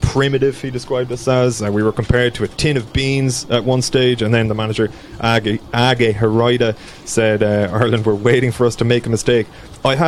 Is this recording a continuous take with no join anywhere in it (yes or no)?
yes